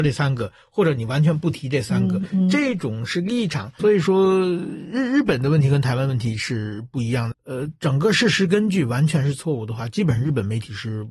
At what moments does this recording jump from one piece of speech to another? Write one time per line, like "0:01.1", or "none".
0:03.8
0:07.3

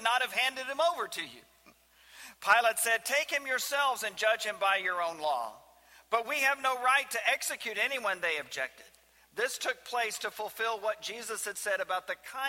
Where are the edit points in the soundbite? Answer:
none

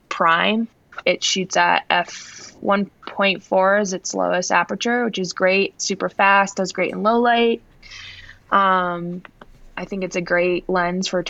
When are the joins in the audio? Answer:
0:01.0

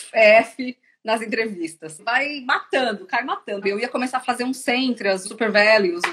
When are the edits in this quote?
0:02.0
0:03.6
0:05.2

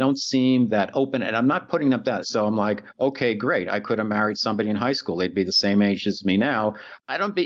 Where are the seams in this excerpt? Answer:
0:02.2

